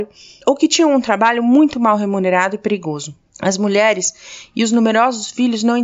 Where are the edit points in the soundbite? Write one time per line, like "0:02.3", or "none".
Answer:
0:03.3